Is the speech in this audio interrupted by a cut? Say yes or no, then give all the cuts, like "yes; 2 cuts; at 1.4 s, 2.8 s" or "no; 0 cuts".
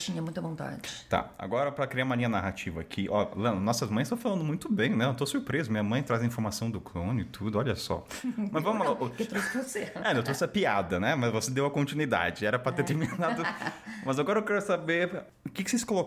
no; 0 cuts